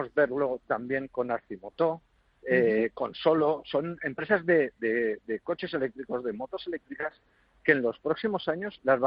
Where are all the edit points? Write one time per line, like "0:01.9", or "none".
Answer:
none